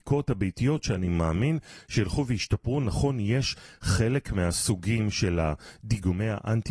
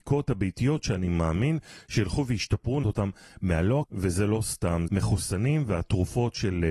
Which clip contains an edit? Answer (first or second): second